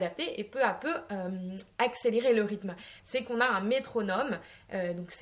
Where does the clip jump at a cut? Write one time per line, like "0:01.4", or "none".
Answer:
0:03.0